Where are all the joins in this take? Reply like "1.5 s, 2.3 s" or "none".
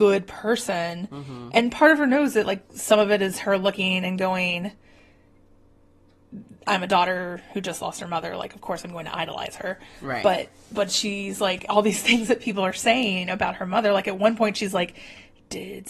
none